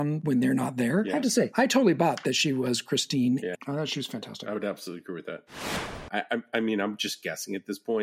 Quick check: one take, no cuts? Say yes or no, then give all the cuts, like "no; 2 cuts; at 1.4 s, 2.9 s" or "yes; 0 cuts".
no; 2 cuts; at 3.5 s, 6.1 s